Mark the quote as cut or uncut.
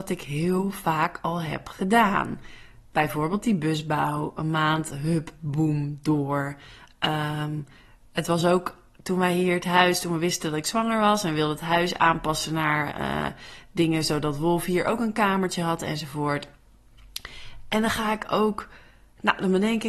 uncut